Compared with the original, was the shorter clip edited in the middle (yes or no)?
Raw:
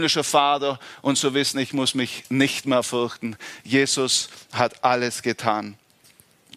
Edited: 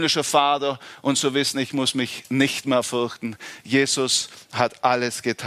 no